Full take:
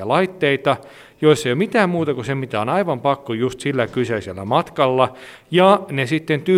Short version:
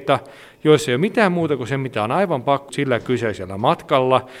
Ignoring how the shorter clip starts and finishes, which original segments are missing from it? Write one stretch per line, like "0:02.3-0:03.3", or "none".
0:03.3-0:03.6